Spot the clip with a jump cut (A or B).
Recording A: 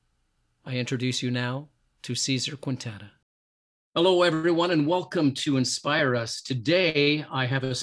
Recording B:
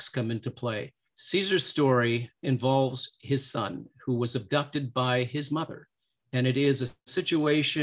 B